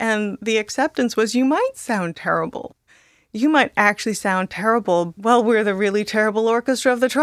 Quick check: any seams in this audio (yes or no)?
yes